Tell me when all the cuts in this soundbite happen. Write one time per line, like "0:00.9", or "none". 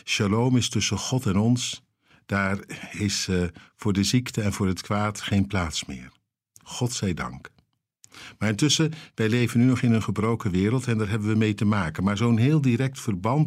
none

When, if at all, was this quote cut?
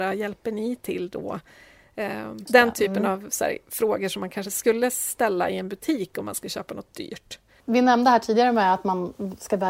0:02.5

